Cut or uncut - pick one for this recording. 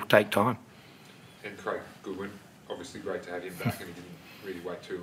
cut